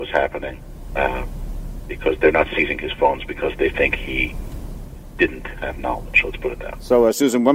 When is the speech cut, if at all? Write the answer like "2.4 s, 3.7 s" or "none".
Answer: none